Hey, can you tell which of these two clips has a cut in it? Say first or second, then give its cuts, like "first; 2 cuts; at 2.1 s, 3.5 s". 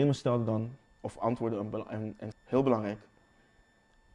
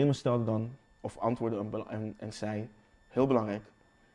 first; 1 cut; at 2.3 s